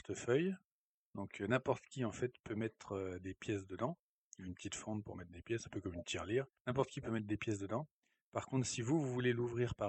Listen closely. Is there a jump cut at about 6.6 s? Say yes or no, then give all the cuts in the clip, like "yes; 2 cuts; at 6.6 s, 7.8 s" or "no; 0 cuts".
no; 0 cuts